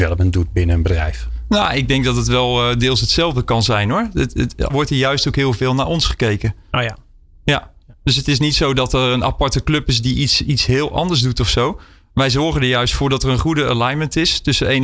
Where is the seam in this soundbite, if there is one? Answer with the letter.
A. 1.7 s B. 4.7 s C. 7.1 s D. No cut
B